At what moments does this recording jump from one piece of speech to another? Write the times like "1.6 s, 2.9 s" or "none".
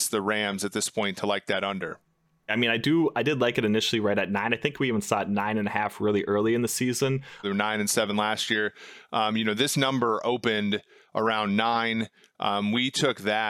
2.5 s, 7.4 s